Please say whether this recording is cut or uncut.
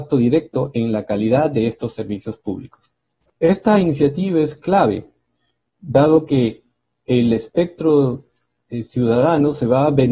cut